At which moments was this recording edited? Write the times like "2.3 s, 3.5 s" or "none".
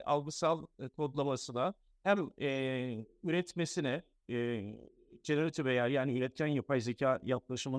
none